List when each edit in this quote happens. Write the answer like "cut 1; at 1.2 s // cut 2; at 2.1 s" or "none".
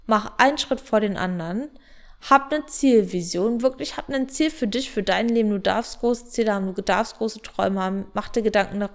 none